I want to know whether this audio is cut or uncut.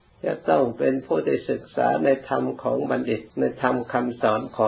cut